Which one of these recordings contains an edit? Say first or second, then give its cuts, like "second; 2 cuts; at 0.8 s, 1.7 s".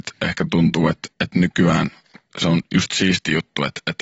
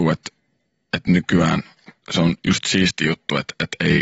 first; 1 cut; at 1.1 s